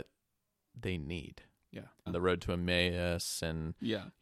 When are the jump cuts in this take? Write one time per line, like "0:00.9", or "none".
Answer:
0:02.1